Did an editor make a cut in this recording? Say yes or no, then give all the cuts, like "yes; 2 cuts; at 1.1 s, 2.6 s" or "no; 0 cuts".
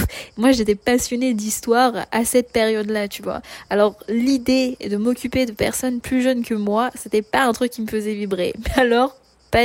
no; 0 cuts